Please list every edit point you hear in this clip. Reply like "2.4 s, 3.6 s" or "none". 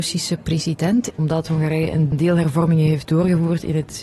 1.1 s

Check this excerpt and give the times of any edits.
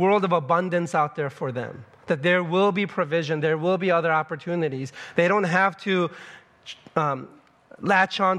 none

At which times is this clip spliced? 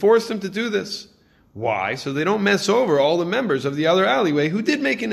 none

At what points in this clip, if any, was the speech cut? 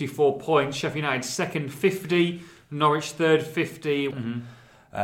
4.1 s

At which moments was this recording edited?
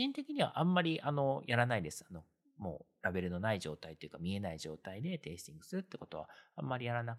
none

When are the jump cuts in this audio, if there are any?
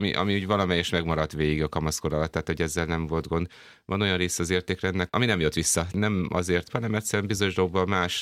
5.1 s, 6.7 s

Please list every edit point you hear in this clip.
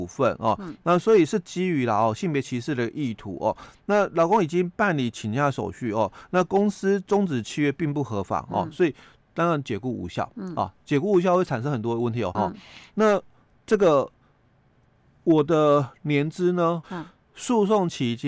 12.3 s, 16.8 s

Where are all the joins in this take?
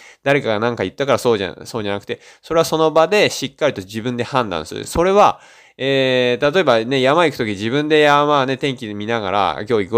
none

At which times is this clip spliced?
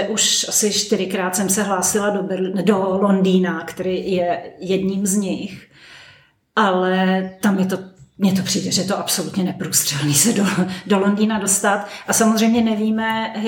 none

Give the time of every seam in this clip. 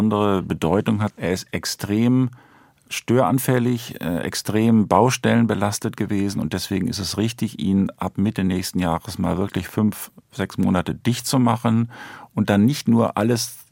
1.1 s

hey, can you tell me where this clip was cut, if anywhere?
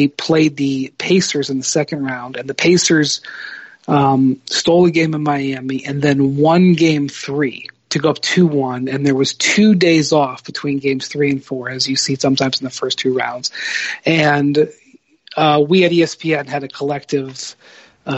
none

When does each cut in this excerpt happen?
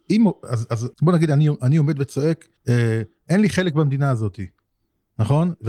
0.9 s, 2.6 s

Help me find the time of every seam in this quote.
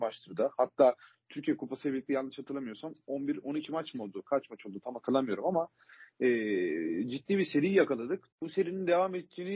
8.3 s

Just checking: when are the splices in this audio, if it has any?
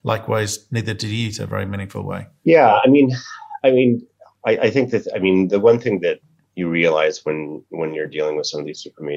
none

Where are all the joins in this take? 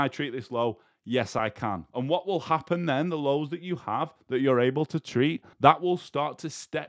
1.9 s, 5.5 s

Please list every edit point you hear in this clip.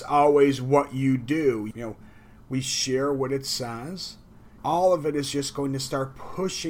1.7 s, 4.6 s

